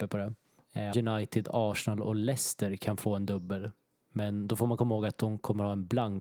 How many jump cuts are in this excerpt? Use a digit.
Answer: 1